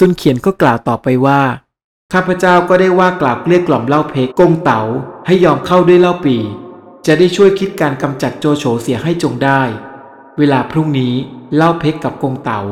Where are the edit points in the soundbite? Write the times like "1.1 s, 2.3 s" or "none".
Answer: 4.3 s